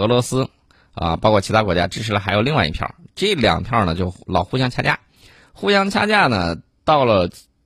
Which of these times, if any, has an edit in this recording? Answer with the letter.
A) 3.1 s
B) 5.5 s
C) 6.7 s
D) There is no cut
D